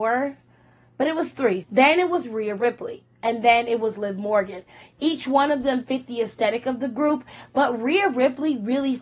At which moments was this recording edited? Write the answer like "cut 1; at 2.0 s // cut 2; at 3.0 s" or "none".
cut 1; at 1.6 s